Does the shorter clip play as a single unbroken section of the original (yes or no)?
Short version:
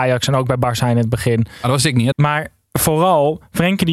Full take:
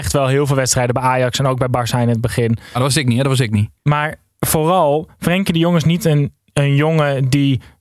no